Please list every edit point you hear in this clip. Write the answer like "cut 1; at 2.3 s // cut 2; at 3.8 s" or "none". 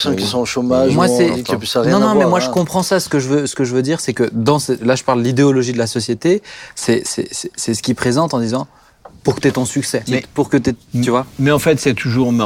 cut 1; at 10.1 s